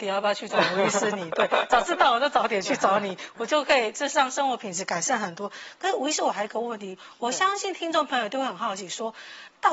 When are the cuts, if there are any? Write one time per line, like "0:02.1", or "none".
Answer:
none

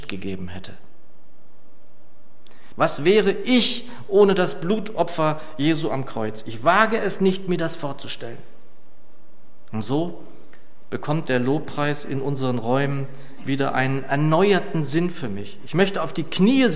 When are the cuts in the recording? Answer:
0:02.7

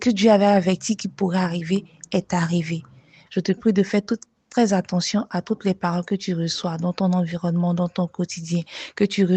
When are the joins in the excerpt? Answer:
0:03.3

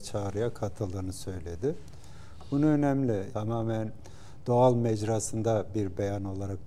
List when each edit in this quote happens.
0:03.3

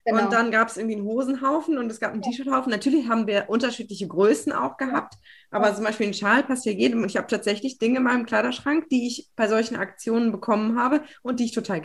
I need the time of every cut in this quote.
none

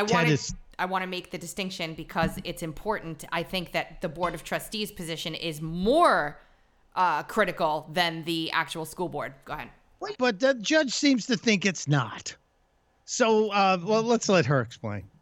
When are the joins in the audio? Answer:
0:10.1

